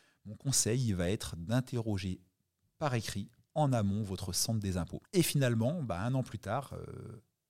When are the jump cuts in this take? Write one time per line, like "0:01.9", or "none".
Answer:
0:05.0